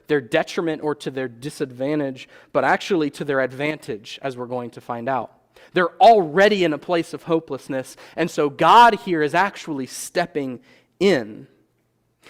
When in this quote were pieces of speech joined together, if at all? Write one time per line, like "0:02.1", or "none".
none